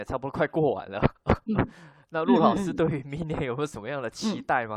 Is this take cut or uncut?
uncut